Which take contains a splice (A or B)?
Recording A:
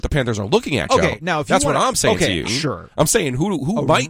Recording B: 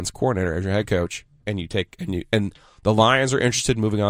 A